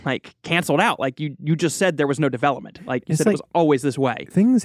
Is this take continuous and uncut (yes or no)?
yes